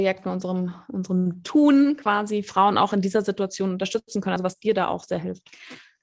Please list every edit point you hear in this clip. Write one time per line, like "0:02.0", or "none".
none